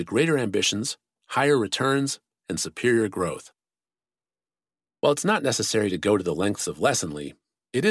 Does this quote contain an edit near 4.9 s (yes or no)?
yes